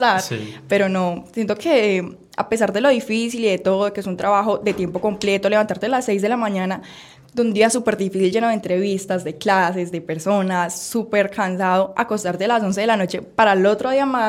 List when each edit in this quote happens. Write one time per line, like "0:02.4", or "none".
none